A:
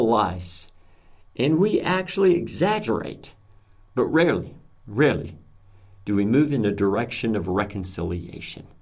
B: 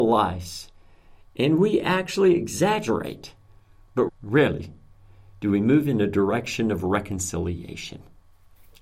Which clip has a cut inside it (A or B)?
B